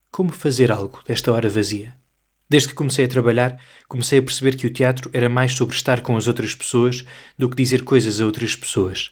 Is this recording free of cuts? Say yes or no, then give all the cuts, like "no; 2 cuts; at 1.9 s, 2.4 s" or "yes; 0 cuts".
no; 1 cut; at 2.4 s